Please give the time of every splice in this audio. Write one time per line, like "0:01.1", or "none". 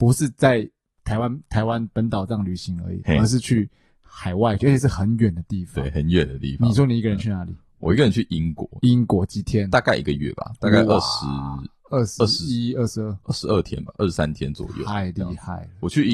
0:04.6